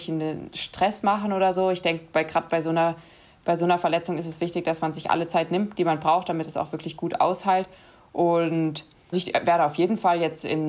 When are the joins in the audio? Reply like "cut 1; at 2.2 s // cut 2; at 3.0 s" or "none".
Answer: cut 1; at 9.1 s